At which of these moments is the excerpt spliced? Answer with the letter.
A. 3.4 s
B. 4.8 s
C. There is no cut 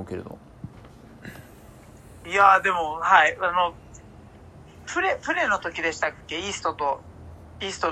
C